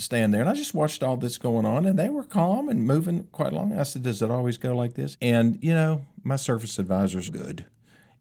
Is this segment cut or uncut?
cut